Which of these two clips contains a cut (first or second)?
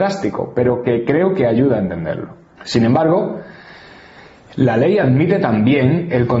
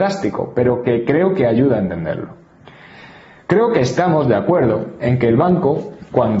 first